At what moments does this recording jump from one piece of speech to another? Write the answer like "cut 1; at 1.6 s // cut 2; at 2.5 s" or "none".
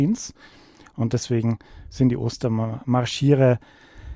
cut 1; at 0.9 s